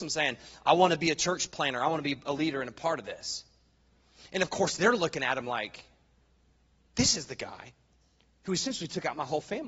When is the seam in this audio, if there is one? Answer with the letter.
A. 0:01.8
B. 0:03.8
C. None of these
C